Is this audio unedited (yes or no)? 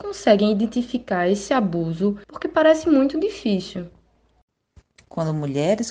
no